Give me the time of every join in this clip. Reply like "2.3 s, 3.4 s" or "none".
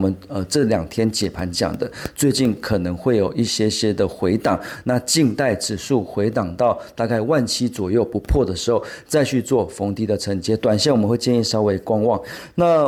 none